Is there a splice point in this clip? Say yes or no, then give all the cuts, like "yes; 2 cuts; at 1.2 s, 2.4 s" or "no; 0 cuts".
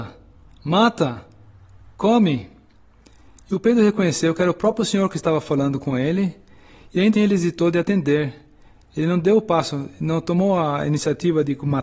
yes; 1 cut; at 7.1 s